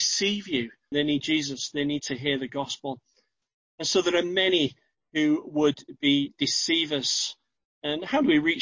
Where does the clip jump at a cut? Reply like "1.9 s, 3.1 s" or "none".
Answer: 0.9 s